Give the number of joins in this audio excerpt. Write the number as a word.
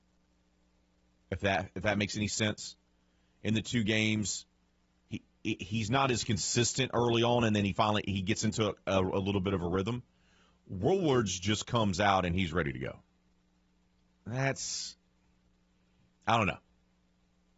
zero